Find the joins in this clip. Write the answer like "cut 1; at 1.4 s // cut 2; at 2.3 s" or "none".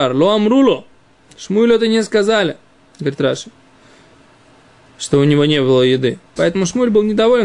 cut 1; at 6.4 s